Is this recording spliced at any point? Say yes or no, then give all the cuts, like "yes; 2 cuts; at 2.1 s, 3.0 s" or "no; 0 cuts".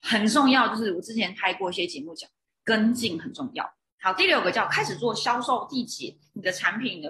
no; 0 cuts